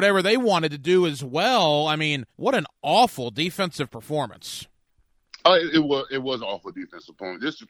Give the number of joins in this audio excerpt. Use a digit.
1